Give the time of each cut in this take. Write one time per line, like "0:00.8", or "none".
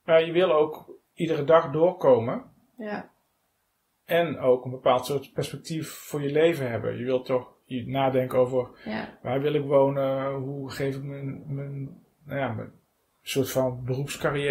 none